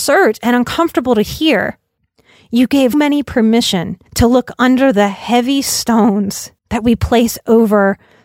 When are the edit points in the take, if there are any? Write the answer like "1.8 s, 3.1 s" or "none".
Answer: 2.9 s, 4.1 s, 6.6 s